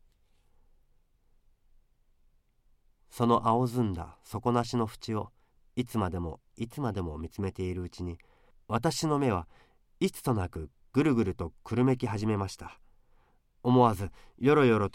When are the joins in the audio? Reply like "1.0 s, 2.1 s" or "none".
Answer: none